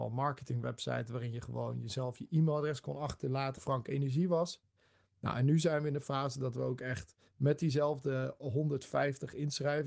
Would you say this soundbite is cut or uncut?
cut